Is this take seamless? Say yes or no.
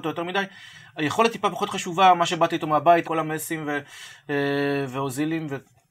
no